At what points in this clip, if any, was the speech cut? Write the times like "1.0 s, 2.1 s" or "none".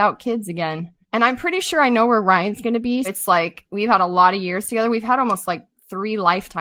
1.0 s, 3.0 s